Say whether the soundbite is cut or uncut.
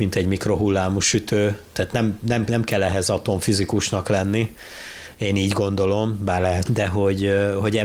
cut